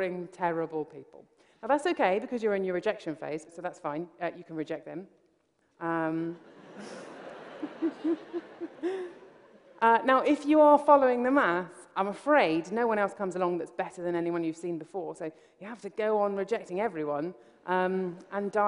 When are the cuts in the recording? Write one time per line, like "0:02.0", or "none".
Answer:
0:05.6